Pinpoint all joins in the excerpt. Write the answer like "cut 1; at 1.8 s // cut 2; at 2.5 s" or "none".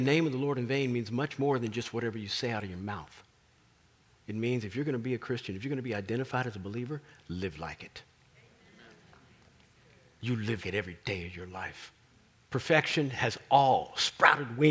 cut 1; at 10.6 s